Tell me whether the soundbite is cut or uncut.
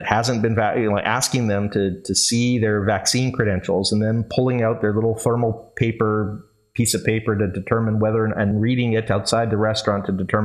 cut